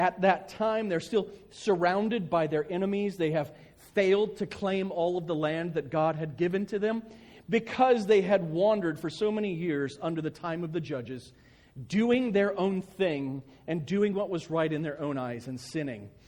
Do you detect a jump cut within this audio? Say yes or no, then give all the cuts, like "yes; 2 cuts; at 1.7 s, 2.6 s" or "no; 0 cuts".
no; 0 cuts